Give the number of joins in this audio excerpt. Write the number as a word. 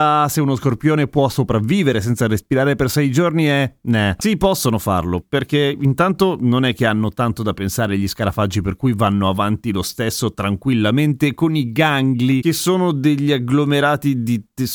two